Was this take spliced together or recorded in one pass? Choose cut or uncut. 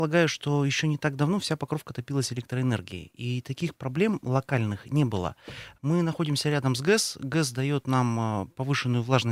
cut